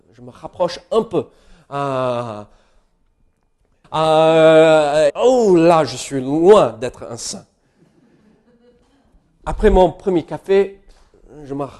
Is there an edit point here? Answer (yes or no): yes